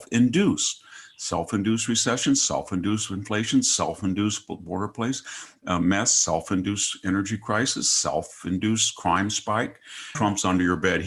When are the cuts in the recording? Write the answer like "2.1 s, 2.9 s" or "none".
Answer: 10.1 s